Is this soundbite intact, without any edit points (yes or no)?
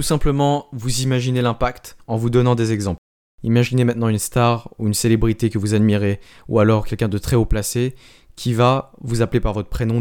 yes